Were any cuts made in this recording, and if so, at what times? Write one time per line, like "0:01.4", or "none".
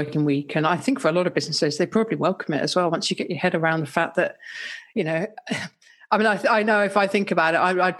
none